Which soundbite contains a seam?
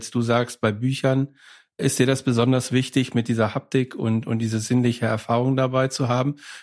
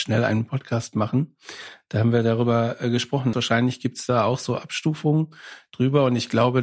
second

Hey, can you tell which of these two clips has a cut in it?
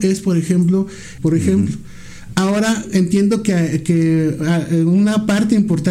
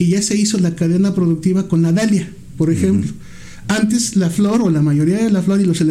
first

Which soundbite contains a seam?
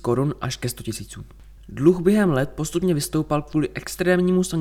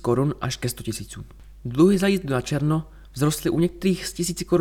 first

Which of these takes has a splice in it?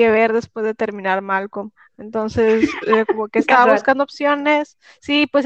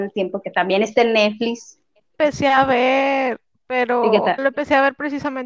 second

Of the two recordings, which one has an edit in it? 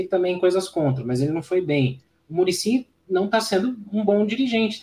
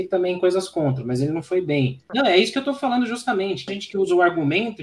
second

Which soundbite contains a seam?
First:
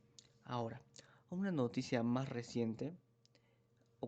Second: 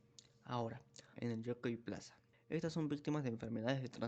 second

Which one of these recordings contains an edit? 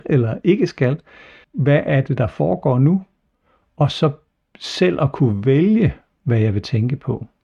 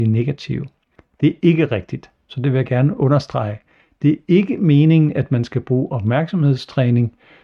first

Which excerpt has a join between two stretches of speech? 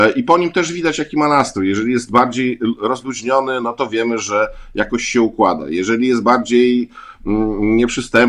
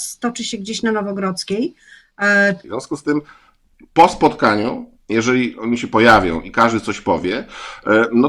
second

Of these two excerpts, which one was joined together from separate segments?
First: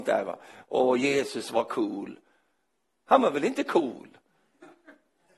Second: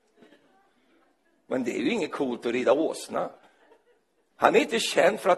second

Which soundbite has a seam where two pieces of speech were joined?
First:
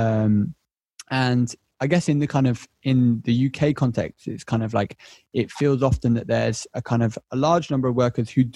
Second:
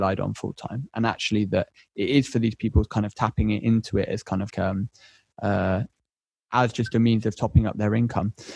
second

